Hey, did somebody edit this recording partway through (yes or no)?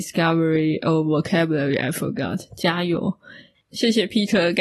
no